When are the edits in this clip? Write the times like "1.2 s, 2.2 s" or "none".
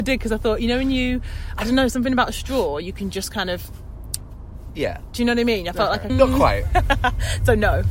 6.1 s